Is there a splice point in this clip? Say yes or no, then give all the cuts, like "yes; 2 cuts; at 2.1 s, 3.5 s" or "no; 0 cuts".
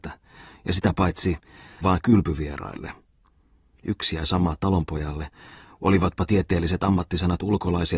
yes; 1 cut; at 1.8 s